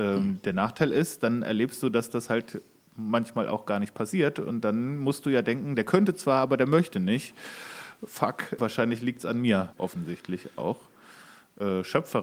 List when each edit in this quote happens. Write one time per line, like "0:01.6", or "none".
0:08.6
0:09.7

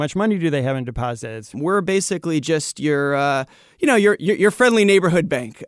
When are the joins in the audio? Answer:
0:01.5

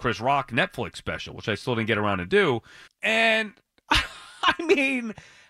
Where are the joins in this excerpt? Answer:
0:02.9

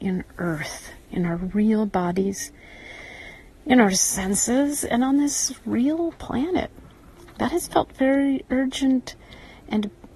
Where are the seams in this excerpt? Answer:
none

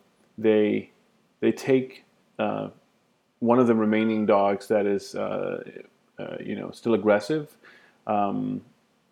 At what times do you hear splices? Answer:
none

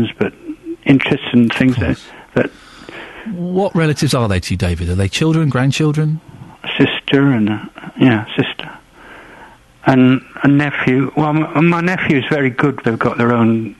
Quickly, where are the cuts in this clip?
0:12.8

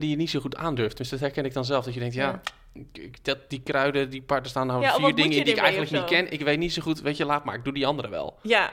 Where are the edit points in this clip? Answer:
none

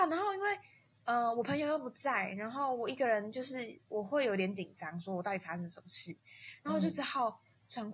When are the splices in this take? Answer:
none

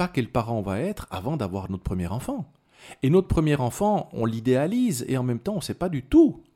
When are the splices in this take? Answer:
none

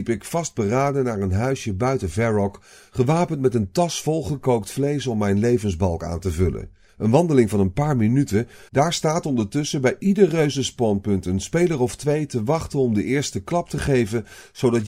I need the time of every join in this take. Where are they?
0:06.9
0:08.7

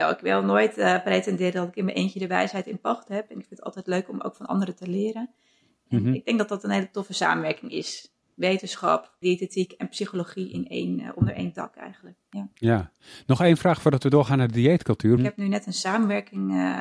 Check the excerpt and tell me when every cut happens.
0:09.2
0:15.2

